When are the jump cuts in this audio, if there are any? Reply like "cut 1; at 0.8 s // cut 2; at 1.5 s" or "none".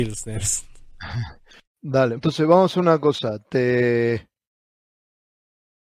cut 1; at 2.2 s